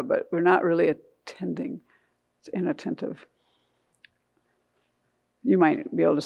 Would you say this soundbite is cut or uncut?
uncut